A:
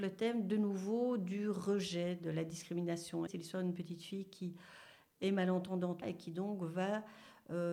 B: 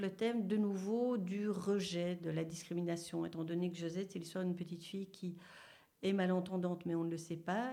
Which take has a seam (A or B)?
A